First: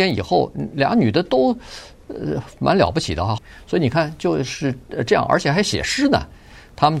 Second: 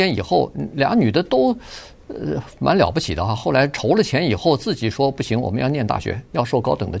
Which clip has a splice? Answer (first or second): first